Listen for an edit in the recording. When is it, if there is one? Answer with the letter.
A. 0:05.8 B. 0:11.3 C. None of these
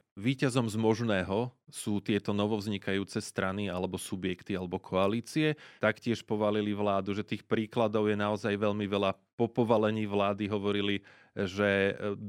A